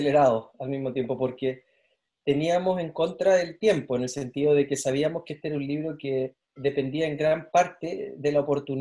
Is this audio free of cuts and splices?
no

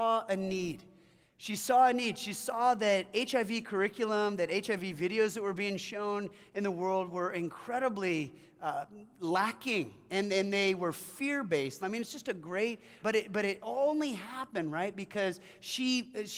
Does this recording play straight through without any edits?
no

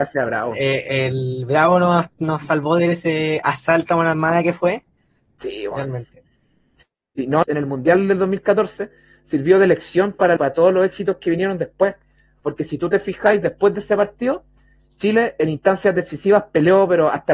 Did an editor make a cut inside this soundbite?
yes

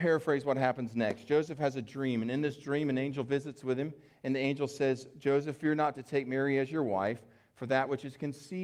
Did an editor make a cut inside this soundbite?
no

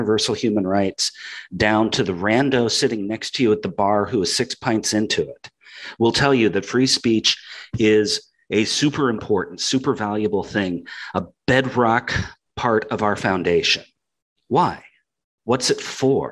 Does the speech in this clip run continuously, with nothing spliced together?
yes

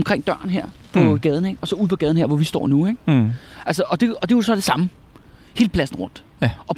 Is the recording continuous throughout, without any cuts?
yes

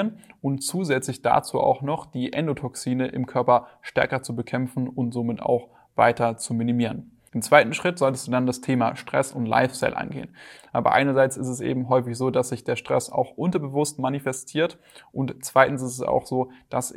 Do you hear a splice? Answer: yes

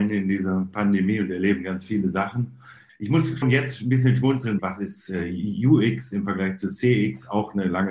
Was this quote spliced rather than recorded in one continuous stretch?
yes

